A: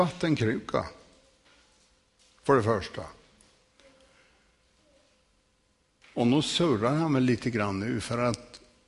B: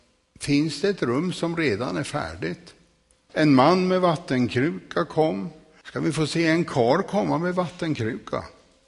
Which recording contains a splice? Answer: B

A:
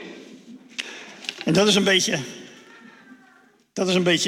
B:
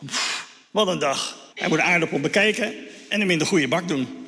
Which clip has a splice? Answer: B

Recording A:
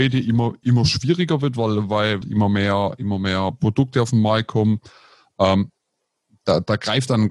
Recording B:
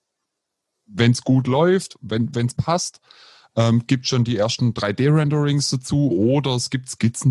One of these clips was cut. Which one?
A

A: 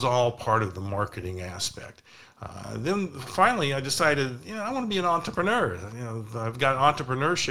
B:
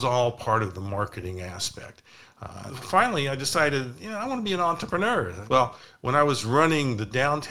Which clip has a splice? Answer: B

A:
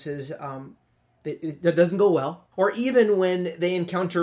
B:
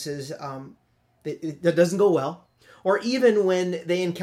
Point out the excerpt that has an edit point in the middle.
A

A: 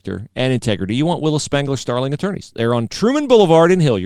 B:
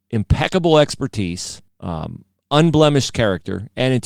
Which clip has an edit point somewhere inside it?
B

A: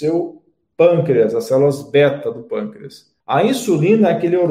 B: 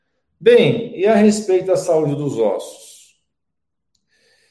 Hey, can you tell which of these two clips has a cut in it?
A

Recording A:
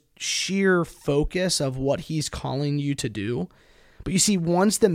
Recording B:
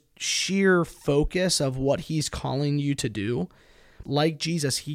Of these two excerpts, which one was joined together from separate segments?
B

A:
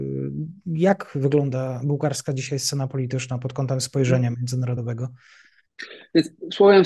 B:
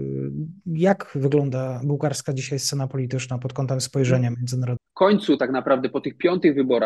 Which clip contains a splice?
B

